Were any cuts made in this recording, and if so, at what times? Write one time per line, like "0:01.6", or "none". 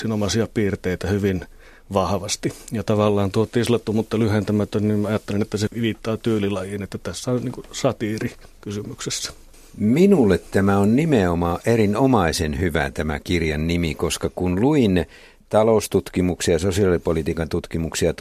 none